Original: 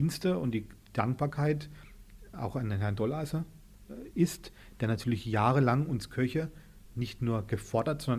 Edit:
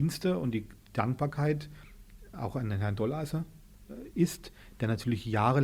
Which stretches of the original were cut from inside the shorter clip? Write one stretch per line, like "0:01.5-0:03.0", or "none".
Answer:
none